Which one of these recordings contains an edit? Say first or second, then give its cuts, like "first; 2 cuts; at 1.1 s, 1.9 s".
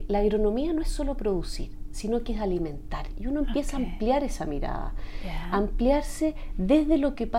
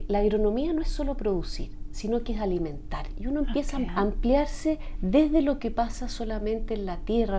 second; 1 cut; at 3.9 s